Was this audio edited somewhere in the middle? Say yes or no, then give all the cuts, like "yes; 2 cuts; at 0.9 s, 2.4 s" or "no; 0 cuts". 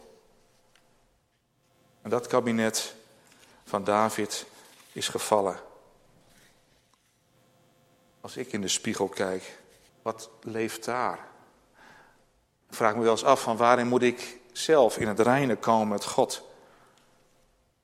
yes; 1 cut; at 9.9 s